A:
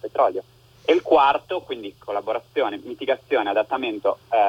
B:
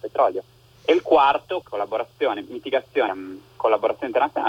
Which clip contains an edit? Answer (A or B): B